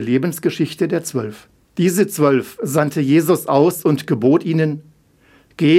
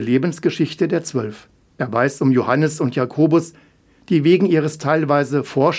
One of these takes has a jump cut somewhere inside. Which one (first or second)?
first